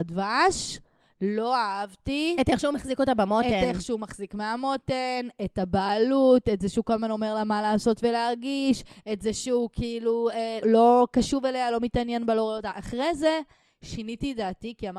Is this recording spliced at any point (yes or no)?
yes